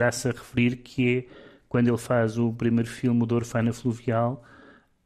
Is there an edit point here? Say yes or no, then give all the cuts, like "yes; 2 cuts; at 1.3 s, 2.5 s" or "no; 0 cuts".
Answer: no; 0 cuts